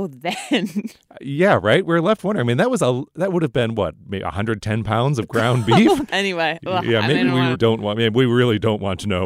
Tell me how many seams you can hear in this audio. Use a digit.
2